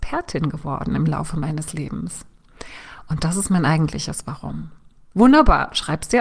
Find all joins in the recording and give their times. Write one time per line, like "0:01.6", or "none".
0:05.1